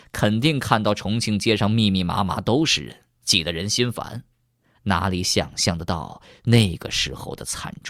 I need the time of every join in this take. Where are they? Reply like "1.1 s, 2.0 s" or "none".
none